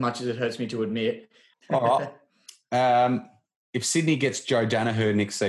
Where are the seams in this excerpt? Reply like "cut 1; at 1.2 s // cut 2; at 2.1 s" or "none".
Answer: cut 1; at 1.5 s